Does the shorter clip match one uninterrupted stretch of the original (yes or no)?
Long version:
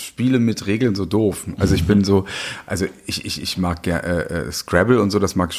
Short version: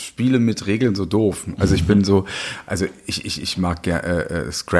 yes